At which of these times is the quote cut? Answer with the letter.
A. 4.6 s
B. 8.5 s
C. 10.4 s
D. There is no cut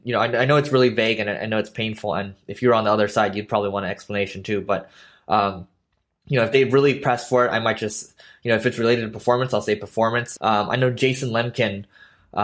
C